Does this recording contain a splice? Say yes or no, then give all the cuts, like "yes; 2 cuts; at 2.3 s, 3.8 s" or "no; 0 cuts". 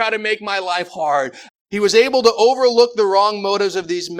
yes; 1 cut; at 1.5 s